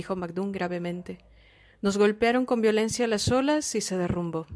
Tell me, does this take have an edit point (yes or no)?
no